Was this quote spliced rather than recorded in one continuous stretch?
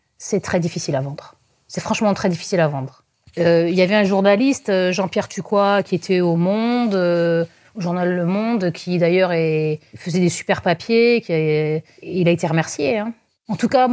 no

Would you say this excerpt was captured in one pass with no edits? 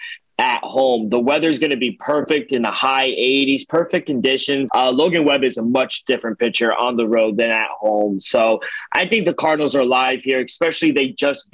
no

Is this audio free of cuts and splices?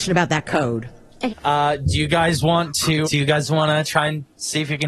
no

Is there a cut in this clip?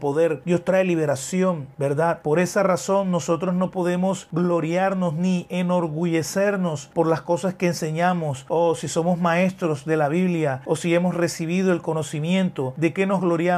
yes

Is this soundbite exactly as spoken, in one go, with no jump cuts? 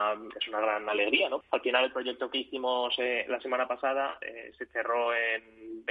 no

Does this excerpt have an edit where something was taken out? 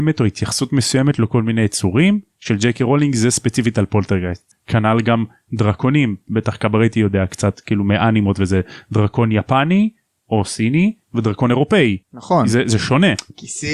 yes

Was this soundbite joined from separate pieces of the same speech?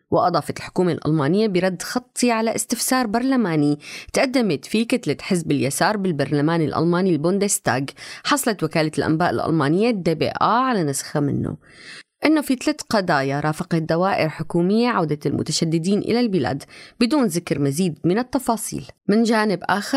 yes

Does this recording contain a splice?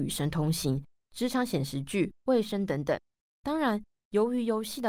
no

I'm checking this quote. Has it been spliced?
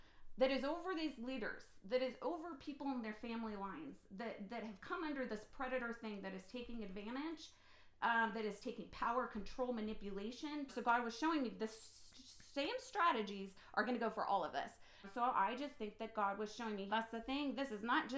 yes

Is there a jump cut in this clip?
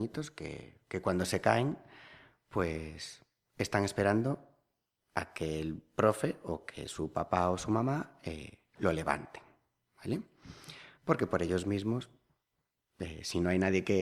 no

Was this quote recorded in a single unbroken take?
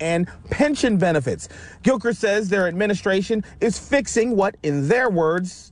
yes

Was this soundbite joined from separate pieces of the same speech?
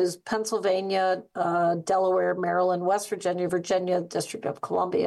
no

